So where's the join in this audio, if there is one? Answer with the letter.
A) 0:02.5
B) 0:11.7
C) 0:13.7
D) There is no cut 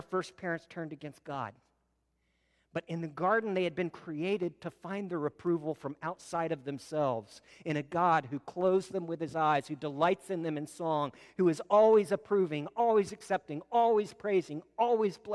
D